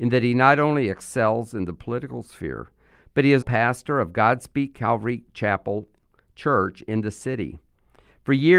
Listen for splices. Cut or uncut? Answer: cut